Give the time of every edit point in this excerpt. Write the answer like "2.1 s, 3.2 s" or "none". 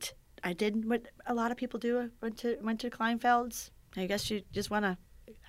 none